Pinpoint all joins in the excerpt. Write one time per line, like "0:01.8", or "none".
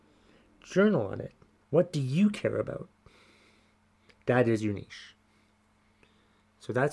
0:01.6